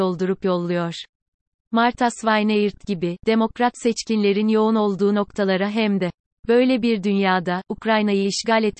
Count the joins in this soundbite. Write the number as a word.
one